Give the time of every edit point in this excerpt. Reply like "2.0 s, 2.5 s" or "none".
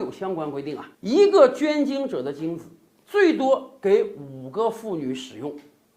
0.9 s